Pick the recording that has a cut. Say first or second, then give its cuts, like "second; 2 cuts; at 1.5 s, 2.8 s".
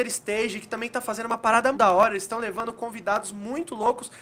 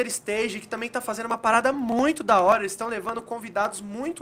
first; 1 cut; at 1.7 s